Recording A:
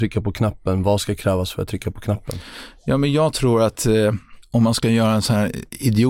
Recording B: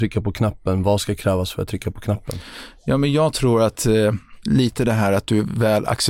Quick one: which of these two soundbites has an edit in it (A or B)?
B